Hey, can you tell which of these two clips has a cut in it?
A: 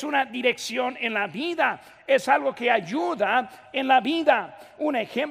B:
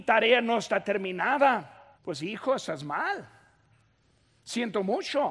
B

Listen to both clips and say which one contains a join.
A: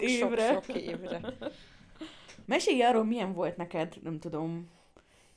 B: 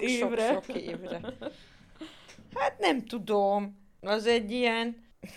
A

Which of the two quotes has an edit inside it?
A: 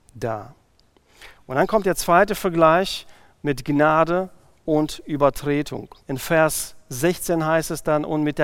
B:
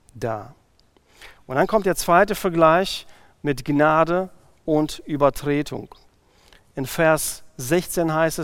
A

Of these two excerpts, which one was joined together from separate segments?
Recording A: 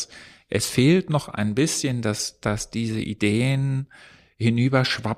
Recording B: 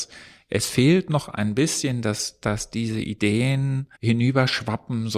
B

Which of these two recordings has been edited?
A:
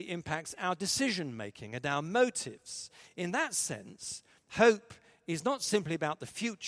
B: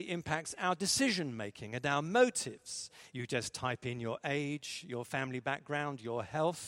B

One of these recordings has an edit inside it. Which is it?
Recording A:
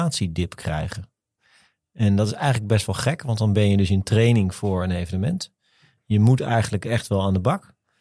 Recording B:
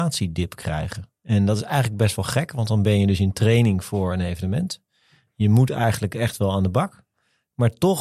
B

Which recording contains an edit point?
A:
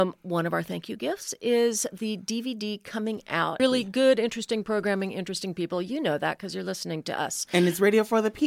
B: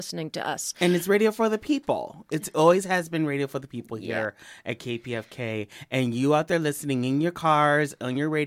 A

